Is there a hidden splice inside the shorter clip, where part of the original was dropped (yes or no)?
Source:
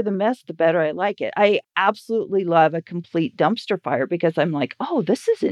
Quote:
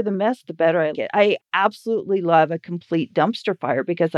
yes